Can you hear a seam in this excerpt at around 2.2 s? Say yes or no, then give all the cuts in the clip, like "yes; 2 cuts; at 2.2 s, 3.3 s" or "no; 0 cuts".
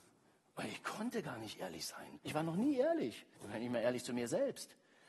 yes; 2 cuts; at 2.2 s, 3.3 s